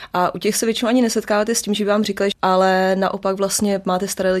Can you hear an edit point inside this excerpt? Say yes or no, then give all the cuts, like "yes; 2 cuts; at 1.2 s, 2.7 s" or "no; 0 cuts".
yes; 1 cut; at 2.3 s